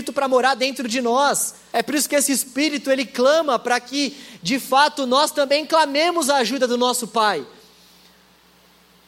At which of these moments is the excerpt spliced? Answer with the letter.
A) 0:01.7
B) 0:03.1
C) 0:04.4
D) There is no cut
A